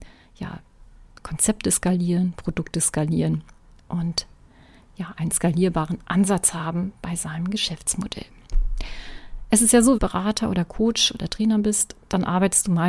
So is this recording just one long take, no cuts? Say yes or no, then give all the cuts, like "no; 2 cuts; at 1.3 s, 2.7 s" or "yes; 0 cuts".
no; 1 cut; at 10.0 s